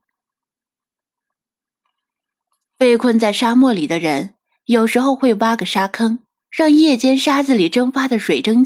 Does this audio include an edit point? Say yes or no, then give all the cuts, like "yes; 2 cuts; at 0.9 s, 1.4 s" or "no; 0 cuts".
yes; 2 cuts; at 2.6 s, 6.4 s